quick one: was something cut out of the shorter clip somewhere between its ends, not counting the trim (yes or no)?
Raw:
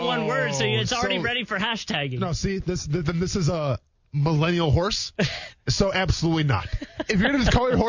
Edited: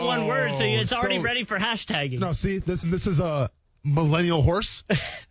yes